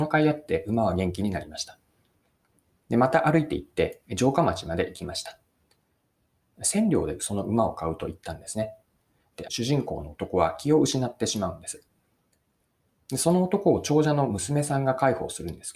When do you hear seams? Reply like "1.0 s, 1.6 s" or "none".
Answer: 6.5 s, 9.4 s